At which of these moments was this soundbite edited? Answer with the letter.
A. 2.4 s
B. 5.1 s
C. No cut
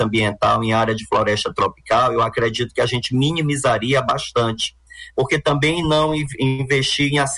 B